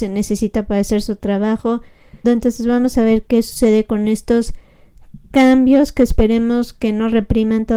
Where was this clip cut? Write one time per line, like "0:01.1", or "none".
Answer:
0:02.2